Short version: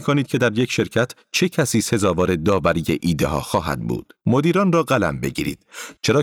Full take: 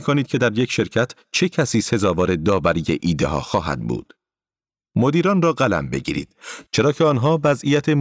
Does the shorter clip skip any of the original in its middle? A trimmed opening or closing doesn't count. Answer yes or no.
yes